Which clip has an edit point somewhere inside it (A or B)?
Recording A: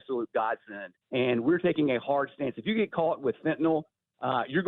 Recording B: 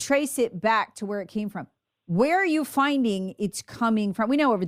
A